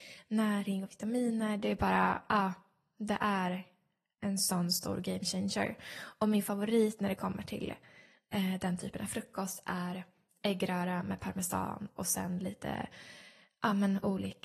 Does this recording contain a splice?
no; 0 cuts

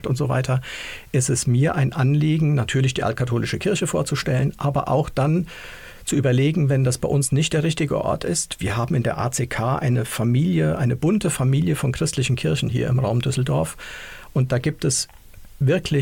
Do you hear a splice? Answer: no; 0 cuts

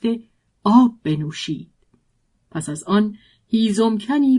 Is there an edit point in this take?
yes; 1 cut; at 2.3 s

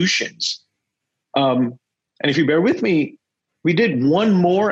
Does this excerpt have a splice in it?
no; 0 cuts

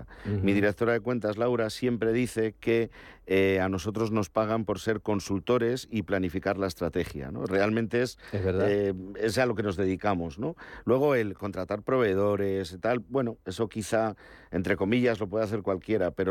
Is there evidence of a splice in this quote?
no; 0 cuts

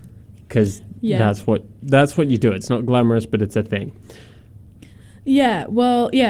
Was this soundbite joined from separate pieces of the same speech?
no; 0 cuts

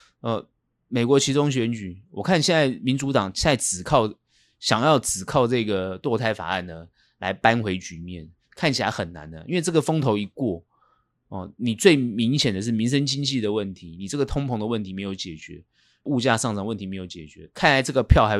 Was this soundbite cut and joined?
no; 0 cuts

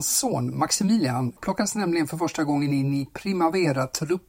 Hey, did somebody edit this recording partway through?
yes; 1 cut; at 1.4 s

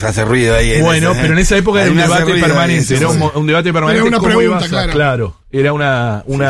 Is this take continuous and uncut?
yes; 0 cuts

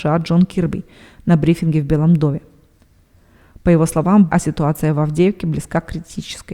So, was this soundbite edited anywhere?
yes; 1 cut; at 4.3 s

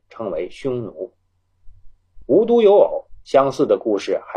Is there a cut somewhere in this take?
no; 0 cuts

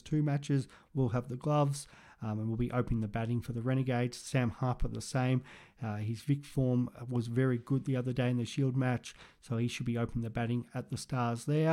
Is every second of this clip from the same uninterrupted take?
yes; 0 cuts

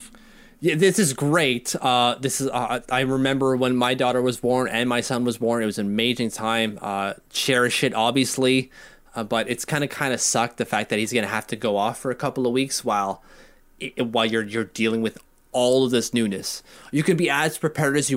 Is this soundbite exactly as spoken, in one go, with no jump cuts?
yes; 0 cuts

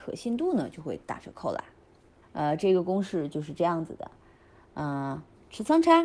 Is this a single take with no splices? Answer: no; 1 cut; at 2.2 s

